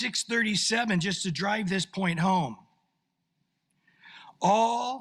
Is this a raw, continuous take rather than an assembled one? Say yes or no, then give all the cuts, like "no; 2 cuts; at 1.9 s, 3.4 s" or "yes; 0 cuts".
yes; 0 cuts